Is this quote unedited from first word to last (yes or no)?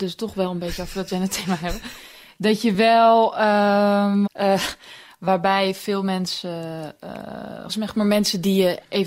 no